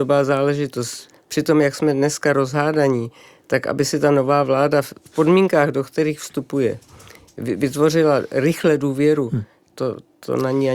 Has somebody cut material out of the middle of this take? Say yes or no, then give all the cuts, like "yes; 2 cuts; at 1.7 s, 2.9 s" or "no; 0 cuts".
no; 0 cuts